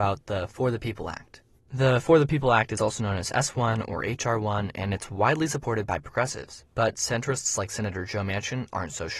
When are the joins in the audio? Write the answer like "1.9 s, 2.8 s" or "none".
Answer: none